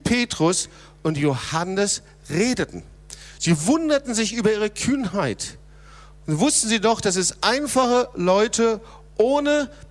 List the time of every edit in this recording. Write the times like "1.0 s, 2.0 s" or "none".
none